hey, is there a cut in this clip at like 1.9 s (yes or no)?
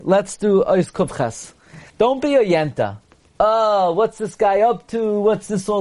yes